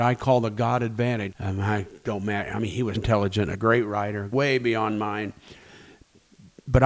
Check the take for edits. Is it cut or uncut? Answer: cut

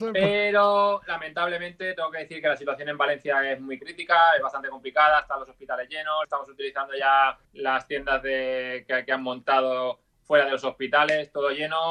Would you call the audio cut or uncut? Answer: cut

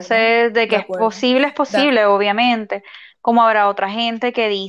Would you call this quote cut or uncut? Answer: uncut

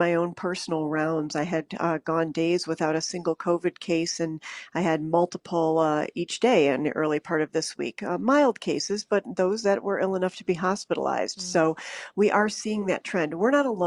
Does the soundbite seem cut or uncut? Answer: uncut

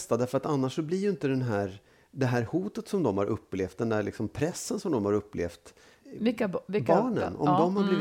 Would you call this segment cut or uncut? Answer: cut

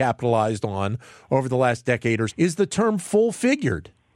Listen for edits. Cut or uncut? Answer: cut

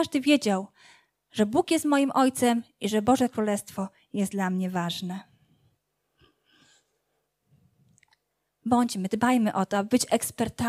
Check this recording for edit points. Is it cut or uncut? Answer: cut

